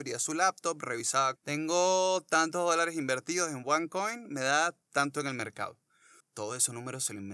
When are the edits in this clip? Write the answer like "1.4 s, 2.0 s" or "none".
1.4 s, 6.2 s